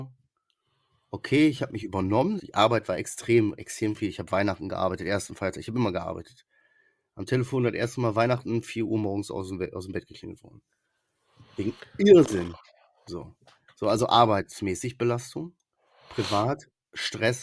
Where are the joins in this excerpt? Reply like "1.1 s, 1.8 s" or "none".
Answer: 2.4 s